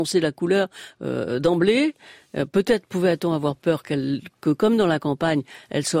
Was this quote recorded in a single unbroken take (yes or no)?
yes